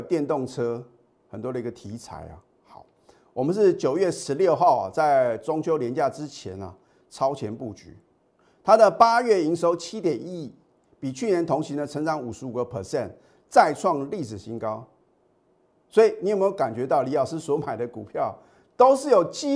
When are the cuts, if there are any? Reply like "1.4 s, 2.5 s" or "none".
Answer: none